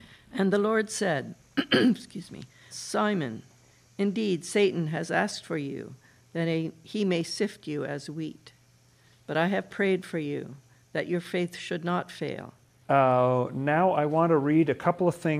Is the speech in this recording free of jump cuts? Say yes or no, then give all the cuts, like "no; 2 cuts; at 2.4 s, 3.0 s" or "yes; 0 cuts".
no; 2 cuts; at 2.7 s, 12.8 s